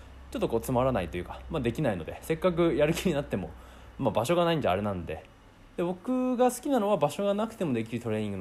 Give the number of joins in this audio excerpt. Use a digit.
0